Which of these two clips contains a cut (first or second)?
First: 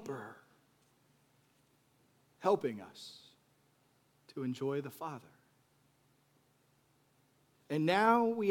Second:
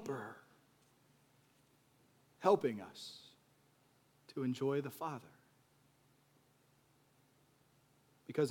first